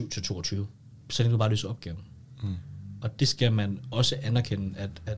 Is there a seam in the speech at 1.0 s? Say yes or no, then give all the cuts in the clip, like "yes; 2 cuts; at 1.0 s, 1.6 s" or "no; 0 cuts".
yes; 1 cut; at 1.0 s